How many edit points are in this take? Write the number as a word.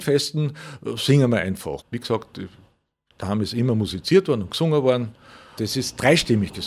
two